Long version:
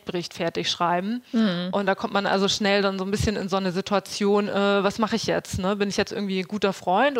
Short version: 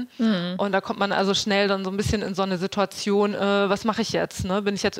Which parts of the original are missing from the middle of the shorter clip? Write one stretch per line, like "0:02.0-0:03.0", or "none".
none